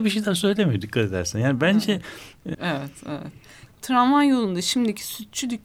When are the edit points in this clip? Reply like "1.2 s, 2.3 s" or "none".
2.5 s, 3.7 s